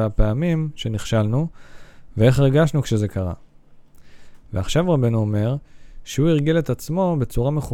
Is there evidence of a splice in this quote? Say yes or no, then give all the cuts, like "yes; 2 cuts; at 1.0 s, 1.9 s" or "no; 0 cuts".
yes; 1 cut; at 4.5 s